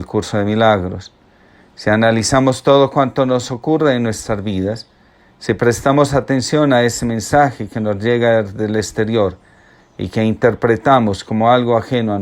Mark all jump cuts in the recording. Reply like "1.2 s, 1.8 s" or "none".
none